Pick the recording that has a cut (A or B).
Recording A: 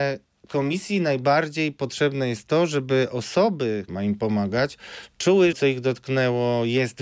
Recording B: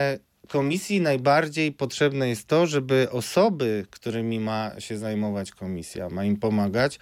A